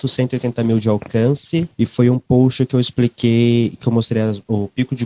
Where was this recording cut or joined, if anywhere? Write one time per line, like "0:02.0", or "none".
none